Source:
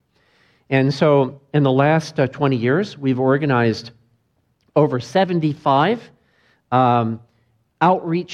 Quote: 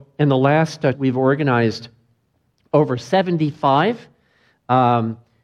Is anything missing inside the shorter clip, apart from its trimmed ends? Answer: yes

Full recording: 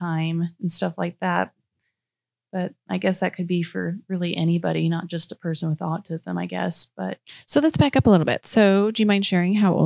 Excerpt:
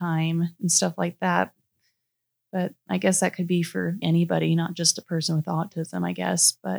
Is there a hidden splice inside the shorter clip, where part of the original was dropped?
yes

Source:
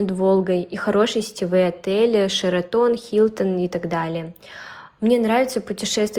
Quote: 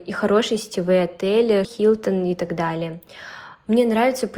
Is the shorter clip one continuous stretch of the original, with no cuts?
no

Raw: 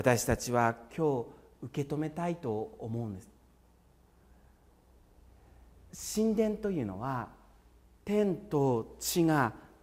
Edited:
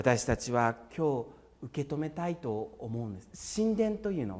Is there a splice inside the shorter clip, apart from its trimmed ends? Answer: yes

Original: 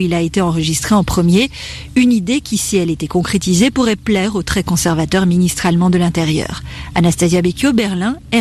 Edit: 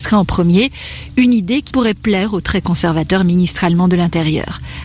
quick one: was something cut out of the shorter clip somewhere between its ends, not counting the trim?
yes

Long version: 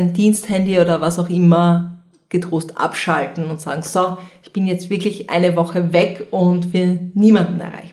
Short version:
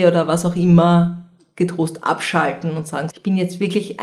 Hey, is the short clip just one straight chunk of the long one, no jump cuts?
no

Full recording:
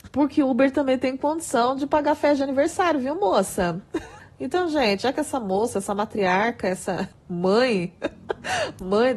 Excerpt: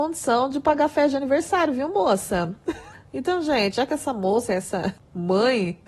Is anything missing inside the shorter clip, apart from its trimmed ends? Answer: yes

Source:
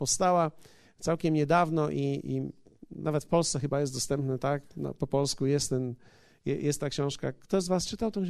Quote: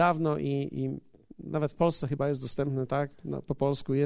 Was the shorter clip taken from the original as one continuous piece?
yes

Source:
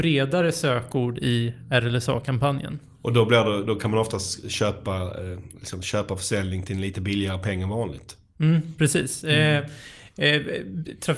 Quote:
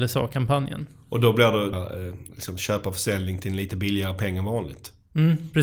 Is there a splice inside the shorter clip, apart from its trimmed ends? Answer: yes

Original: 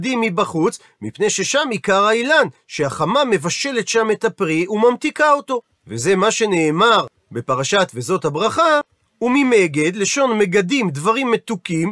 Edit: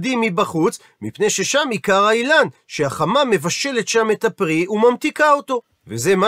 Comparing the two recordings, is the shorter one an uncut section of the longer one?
yes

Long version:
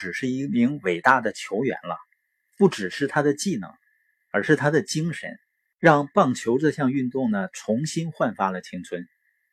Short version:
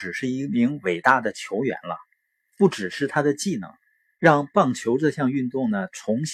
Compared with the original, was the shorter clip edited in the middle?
yes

